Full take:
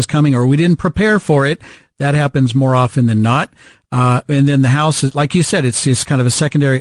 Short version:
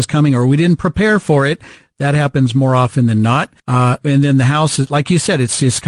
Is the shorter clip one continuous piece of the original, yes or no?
no